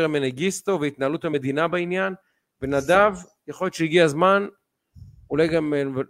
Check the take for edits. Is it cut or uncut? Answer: uncut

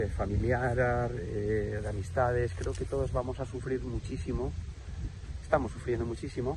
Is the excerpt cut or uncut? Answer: uncut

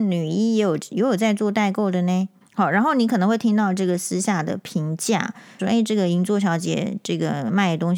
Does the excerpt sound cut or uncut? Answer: cut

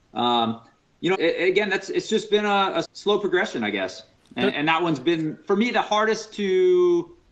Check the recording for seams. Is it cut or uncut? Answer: cut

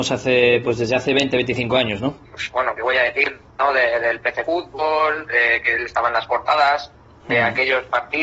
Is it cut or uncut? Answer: cut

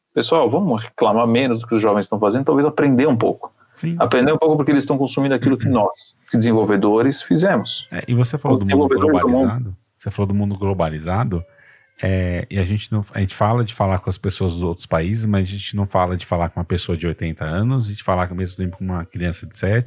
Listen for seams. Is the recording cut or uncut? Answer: cut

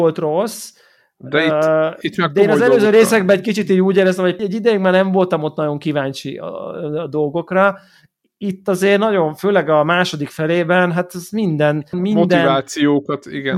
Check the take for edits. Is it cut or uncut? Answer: cut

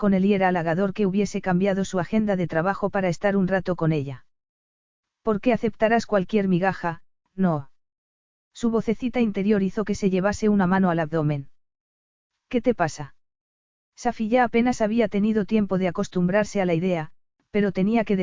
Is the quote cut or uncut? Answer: uncut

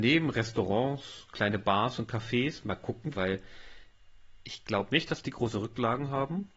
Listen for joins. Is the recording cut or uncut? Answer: cut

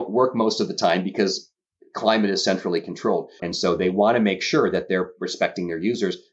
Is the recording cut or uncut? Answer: cut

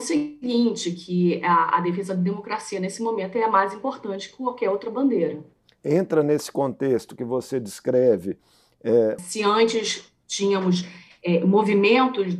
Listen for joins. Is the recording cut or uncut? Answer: cut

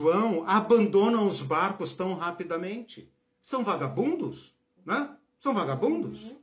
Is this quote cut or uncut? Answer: cut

